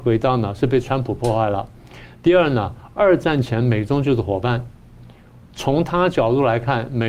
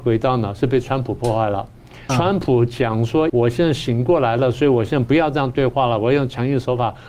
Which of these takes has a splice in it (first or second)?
second